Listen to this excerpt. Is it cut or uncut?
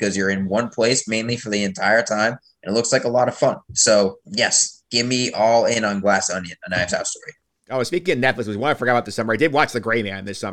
cut